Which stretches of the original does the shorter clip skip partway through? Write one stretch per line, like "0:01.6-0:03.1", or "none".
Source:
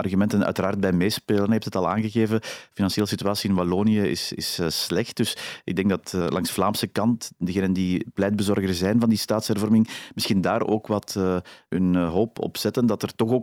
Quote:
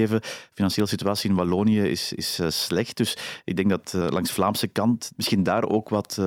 0:07.3-0:10.1